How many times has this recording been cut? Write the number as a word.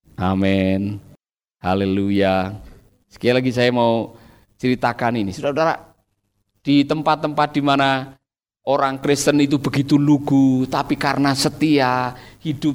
zero